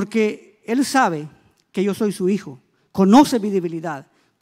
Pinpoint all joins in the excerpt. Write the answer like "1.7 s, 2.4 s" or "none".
none

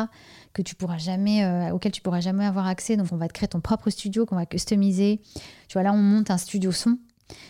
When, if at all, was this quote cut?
none

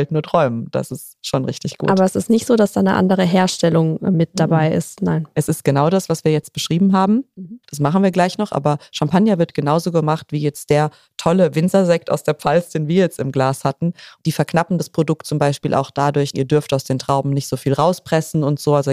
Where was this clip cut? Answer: 7.6 s, 14.2 s, 16.3 s

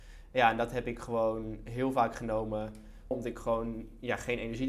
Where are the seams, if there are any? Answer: 3.1 s

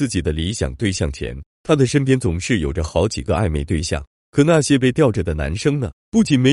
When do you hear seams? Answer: 4.2 s

